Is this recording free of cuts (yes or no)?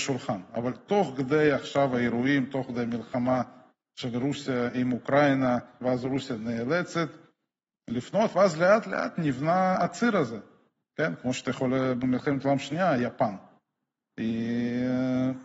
no